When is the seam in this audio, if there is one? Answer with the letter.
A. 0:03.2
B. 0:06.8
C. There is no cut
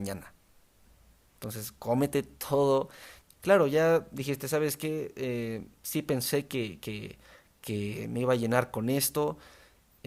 A